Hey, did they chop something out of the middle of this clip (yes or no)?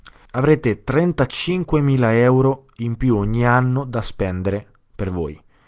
no